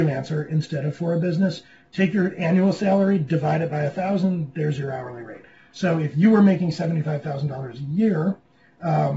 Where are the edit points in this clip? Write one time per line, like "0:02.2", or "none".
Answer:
none